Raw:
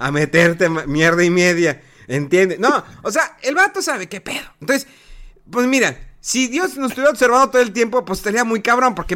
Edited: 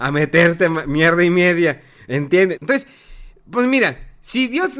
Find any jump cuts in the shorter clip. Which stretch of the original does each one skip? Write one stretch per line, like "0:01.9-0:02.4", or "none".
0:02.6-0:04.6